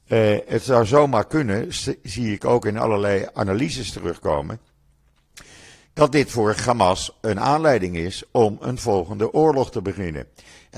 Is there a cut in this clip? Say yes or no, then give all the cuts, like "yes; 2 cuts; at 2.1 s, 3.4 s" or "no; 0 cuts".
no; 0 cuts